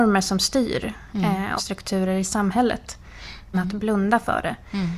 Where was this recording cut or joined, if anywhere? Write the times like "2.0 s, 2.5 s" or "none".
1.6 s, 3.5 s